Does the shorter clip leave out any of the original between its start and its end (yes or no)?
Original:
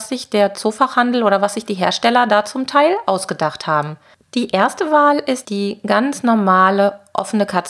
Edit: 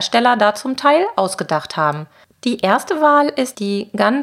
no